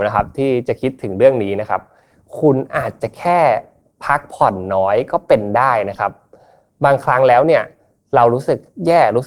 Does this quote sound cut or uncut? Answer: uncut